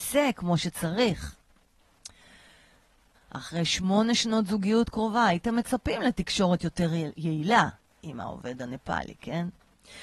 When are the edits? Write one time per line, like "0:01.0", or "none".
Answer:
0:03.1